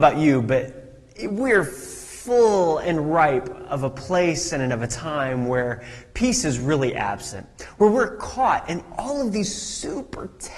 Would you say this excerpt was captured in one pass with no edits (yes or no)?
yes